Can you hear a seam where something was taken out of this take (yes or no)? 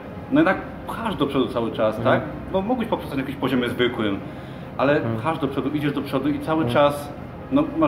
no